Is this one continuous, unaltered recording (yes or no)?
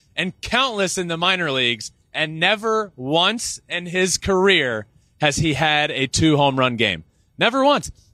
yes